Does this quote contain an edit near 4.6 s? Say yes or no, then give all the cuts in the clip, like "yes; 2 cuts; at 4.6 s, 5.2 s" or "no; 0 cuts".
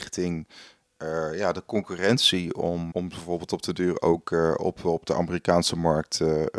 no; 1 cut; at 2.9 s